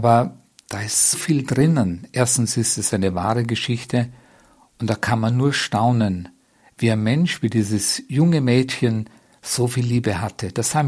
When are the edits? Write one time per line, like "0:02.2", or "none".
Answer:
0:01.1